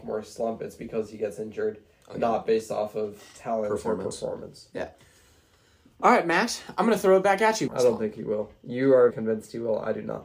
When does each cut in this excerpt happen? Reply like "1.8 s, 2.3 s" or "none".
7.7 s, 9.1 s